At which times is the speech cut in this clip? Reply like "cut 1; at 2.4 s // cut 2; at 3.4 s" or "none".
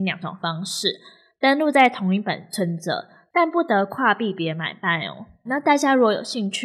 cut 1; at 5.5 s